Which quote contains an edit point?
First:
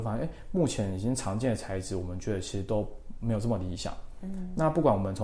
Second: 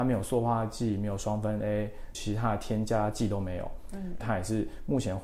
second; 2 cuts; at 2.1 s, 4.2 s

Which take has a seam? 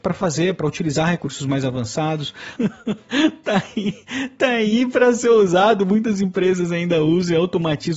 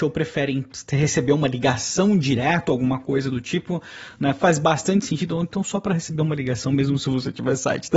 first; 1 cut; at 2.6 s

